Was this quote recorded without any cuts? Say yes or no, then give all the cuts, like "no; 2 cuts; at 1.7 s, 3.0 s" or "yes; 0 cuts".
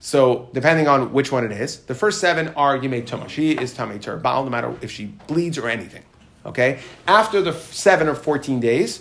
yes; 0 cuts